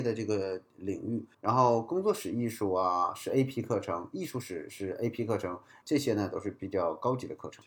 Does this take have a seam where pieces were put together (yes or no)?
yes